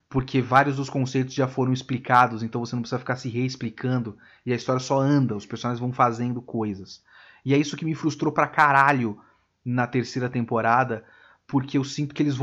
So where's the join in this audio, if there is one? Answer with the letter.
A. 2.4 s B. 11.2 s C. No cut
C